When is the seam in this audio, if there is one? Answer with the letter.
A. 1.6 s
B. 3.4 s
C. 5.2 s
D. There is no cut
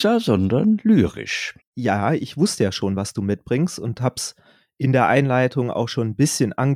A